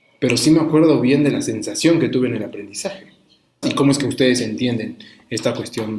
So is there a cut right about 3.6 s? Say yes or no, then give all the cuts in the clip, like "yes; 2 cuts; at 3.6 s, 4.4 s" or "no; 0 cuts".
yes; 1 cut; at 3.6 s